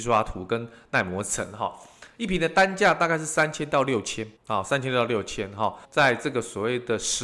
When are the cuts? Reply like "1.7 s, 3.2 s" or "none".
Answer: 4.4 s, 5.8 s